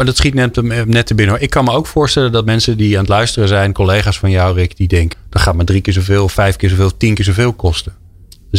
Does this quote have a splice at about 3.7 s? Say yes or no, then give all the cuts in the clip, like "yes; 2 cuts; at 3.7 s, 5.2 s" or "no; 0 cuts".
no; 1 cut; at 5.1 s